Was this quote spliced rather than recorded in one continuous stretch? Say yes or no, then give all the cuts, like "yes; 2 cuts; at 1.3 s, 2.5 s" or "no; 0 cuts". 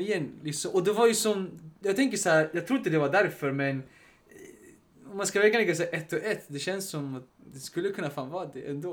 yes; 1 cut; at 7.3 s